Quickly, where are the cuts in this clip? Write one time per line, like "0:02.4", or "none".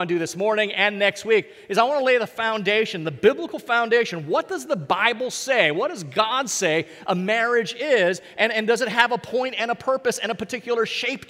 none